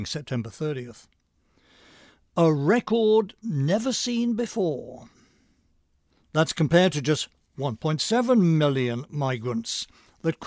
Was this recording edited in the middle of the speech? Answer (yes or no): no